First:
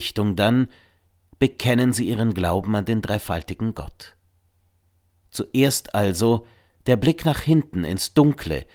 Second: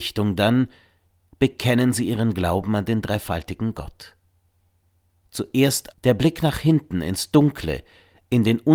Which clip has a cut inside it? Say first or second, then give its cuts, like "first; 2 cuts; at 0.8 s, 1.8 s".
second; 1 cut; at 5.9 s